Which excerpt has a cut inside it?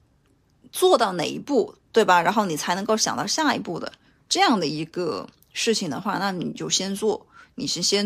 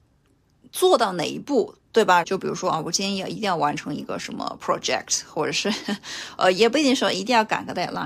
second; 1 cut; at 2.2 s

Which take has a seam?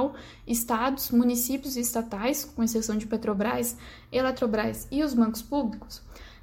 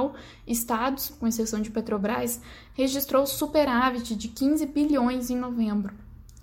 second; 2 cuts; at 1.1 s, 2.7 s

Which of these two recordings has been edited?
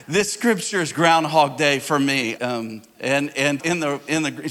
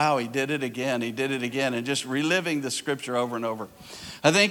first; 2 cuts; at 2.4 s, 3.6 s

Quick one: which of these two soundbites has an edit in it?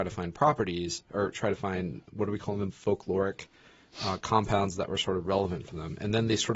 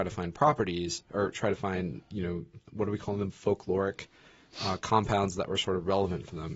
first; 1 cut; at 2.1 s

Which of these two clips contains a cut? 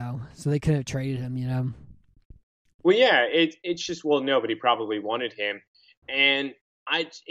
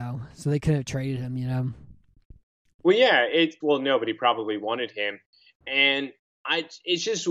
second; 1 cut; at 3.6 s

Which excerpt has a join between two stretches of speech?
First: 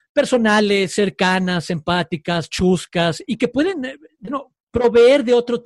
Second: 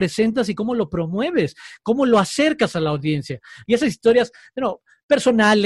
second; 1 cut; at 3.6 s

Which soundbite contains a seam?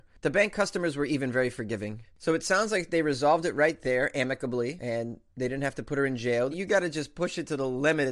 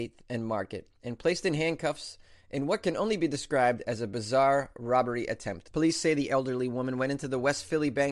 first; 1 cut; at 6.5 s

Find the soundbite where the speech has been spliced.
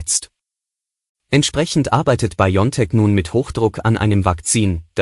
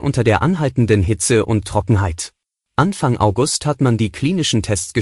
second; 1 cut; at 2.6 s

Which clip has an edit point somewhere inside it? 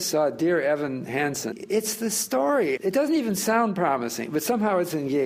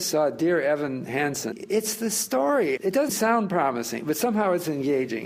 second; 1 cut; at 3.1 s

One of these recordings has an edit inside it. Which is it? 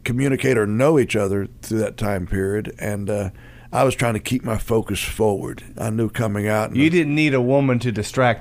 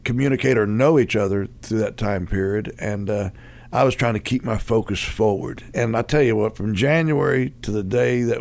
second; 1 cut; at 5.7 s

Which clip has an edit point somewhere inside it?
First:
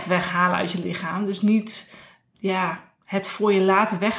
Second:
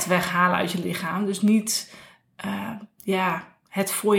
first; 1 cut; at 2.3 s

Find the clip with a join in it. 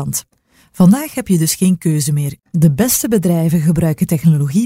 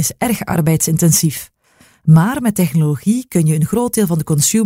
first; 1 cut; at 2.4 s

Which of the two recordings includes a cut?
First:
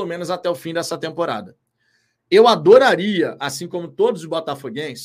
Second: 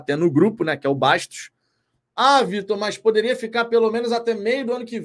second; 1 cut; at 2.0 s

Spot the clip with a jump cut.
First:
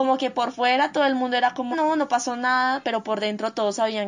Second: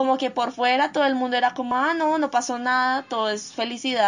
first; 2 cuts; at 1.7 s, 2.8 s

